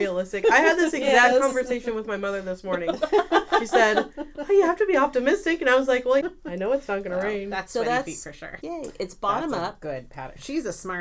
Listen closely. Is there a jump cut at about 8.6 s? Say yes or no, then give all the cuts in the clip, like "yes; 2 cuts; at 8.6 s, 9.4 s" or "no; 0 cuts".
yes; 2 cuts; at 6.2 s, 8.6 s